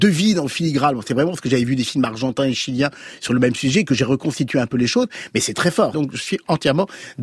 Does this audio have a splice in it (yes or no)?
yes